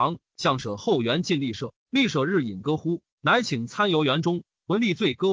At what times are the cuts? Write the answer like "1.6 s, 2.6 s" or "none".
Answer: 3.1 s